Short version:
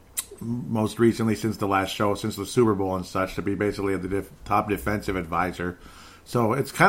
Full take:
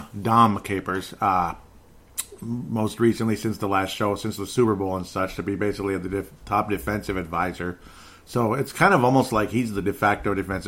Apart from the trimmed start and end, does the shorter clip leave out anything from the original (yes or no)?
no